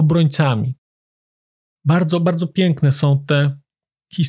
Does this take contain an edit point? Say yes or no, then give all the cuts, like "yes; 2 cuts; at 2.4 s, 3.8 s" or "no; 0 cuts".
no; 0 cuts